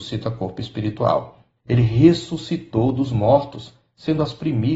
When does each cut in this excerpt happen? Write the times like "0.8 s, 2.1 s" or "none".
1.6 s